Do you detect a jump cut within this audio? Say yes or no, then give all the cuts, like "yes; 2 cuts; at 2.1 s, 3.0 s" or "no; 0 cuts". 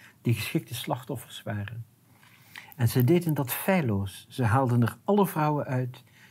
no; 0 cuts